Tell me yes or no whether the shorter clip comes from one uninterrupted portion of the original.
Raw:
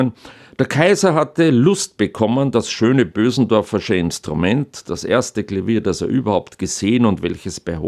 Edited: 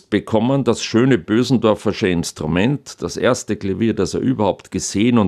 yes